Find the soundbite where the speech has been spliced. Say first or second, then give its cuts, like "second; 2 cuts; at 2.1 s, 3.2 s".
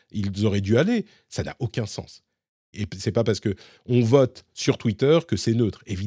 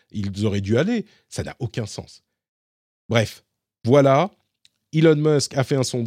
first; 1 cut; at 2.7 s